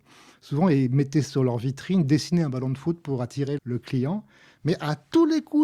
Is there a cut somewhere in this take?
yes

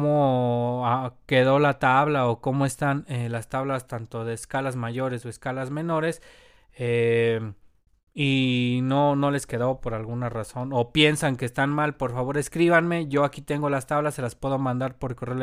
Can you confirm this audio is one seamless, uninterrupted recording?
yes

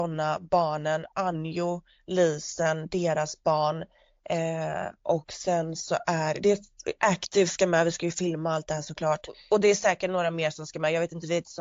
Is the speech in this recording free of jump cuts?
yes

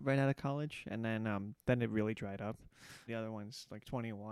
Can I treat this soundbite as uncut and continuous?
no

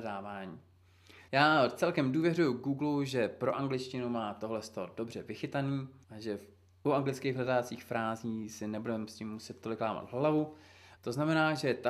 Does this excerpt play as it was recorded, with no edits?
no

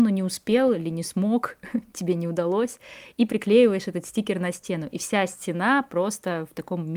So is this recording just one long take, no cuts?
yes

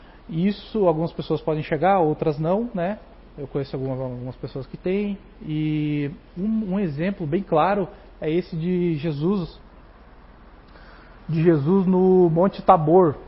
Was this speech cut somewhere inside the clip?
no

